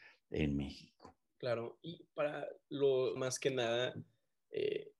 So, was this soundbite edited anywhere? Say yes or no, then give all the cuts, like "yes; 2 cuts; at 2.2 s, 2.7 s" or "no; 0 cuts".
yes; 2 cuts; at 1.4 s, 3.2 s